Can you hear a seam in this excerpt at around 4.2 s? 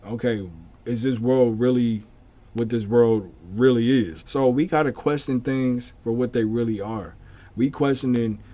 yes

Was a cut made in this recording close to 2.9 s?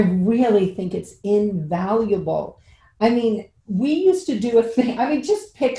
no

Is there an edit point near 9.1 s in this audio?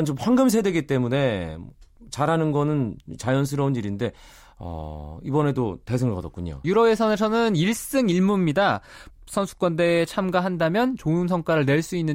yes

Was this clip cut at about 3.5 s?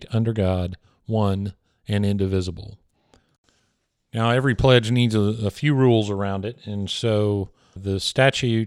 no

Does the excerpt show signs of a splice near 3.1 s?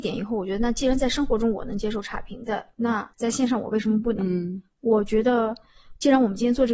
yes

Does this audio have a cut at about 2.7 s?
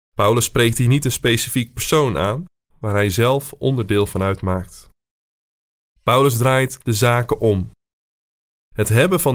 yes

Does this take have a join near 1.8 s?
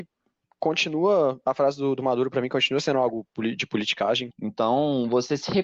no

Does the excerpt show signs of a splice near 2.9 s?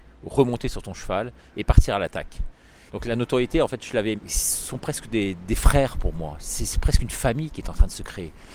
yes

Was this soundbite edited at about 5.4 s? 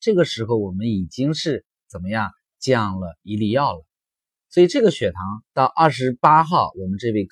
yes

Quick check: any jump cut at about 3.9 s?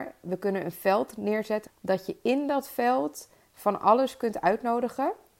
no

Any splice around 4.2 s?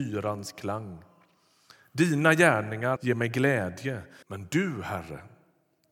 yes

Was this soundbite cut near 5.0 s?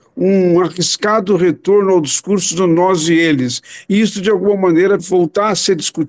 yes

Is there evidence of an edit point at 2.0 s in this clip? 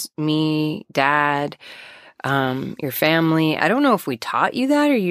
no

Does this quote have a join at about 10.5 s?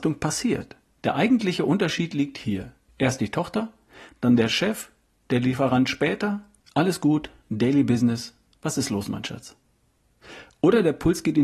no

